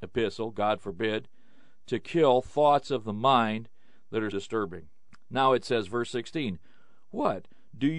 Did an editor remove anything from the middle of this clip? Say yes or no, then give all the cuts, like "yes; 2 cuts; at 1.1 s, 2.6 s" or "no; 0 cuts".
yes; 1 cut; at 4.3 s